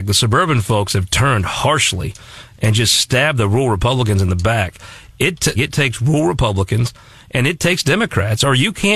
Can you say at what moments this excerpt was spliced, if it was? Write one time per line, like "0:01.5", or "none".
0:05.6